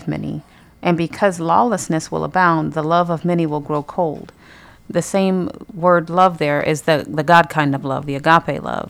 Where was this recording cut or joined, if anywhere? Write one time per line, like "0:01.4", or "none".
none

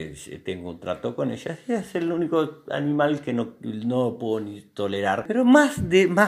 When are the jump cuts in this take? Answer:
none

